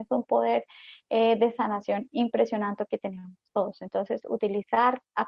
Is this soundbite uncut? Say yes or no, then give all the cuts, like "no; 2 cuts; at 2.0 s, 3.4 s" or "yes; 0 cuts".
yes; 0 cuts